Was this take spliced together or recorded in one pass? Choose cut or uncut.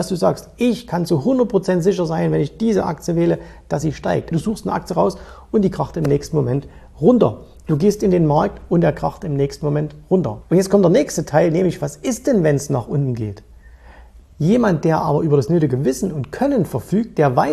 cut